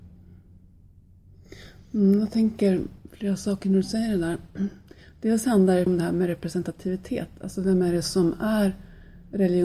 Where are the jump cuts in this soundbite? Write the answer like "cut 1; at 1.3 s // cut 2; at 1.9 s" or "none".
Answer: cut 1; at 5.9 s